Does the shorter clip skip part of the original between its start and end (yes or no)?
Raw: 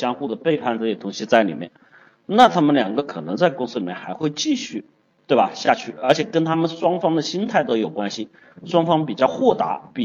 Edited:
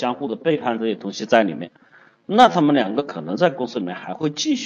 no